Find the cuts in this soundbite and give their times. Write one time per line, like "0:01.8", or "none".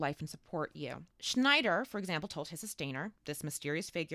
0:01.1